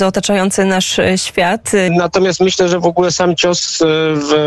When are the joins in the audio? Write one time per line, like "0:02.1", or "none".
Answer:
0:01.9